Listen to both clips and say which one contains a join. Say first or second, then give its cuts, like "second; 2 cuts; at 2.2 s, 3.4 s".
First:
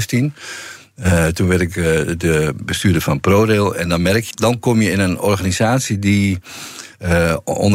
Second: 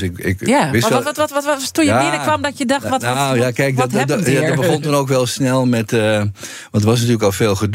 first; 1 cut; at 4.3 s